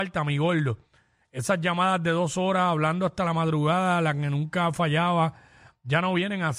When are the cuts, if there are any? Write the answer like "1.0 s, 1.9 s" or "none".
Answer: none